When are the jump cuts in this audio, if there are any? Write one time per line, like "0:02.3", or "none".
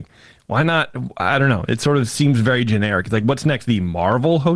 none